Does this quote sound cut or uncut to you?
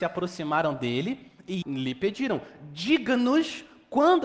cut